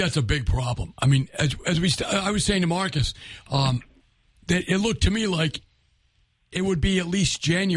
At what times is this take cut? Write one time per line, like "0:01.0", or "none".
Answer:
none